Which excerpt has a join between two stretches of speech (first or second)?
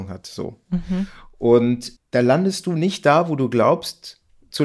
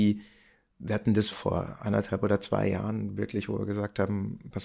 second